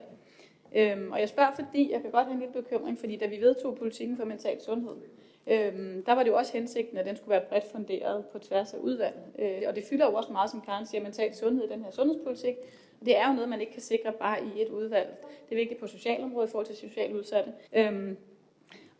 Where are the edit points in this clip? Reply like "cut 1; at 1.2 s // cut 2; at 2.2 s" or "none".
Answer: cut 1; at 9.6 s // cut 2; at 15.2 s // cut 3; at 17.7 s